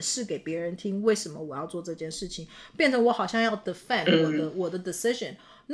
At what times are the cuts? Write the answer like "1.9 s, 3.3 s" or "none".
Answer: none